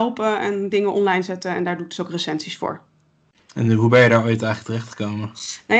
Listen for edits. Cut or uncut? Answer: uncut